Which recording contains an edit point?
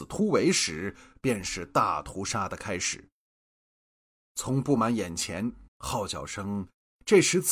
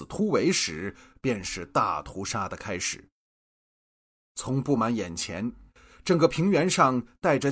first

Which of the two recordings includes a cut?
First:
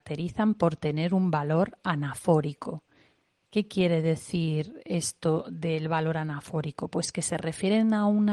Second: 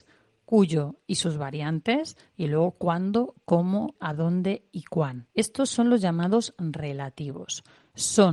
second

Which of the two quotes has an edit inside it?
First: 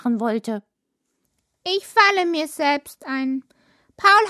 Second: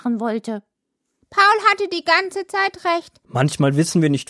second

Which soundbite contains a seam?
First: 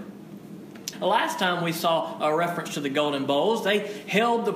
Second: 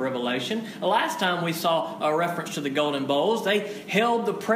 first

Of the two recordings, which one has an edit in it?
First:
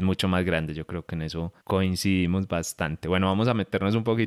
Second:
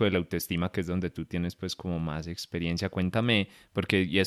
first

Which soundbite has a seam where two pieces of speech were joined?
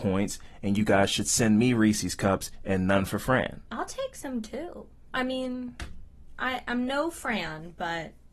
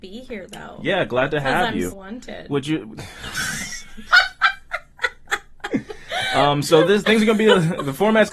second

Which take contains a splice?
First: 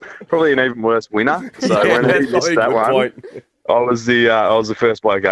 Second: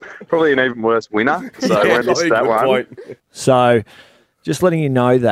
second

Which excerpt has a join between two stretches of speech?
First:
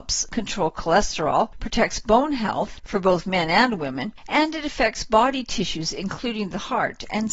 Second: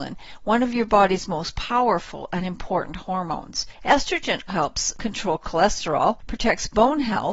second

